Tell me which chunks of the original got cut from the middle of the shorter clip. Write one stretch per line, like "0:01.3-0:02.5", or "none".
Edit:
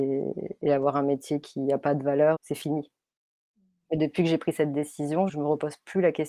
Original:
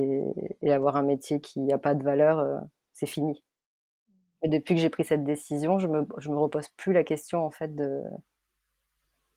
0:02.3-0:02.9
0:05.8-0:06.2